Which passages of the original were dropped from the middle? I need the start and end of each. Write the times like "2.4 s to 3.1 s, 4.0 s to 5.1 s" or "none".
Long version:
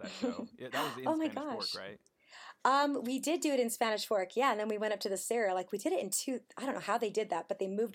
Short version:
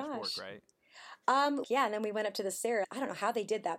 3.0 s to 4.3 s, 5.5 s to 6.5 s